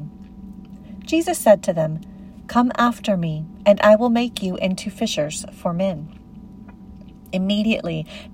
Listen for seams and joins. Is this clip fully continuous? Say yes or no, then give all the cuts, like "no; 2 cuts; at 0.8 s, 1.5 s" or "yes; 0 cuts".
yes; 0 cuts